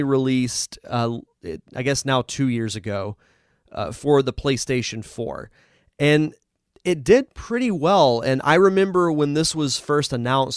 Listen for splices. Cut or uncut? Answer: uncut